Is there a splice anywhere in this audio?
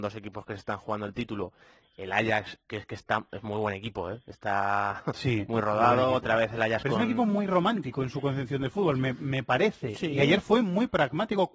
no; 0 cuts

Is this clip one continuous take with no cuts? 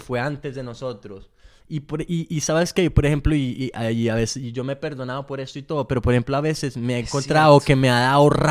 yes; 0 cuts

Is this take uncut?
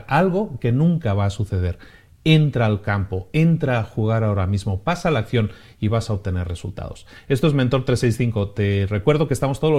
yes; 0 cuts

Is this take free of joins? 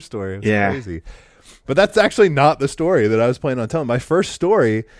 yes; 0 cuts

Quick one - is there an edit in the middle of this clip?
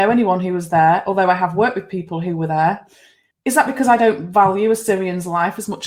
yes; 1 cut; at 3.3 s

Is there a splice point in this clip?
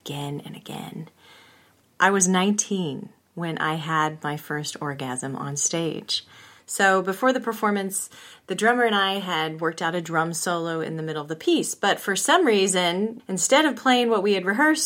yes; 3 cuts; at 1.8 s, 6.6 s, 13.2 s

